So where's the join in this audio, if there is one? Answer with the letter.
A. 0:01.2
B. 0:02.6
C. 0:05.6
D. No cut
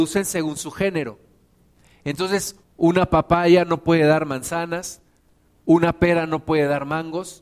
B